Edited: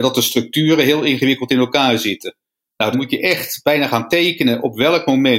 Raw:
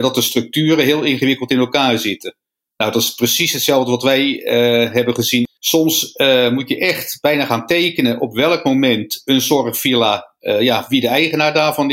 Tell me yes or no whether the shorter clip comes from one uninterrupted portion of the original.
no